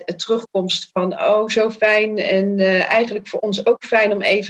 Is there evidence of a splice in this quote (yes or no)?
no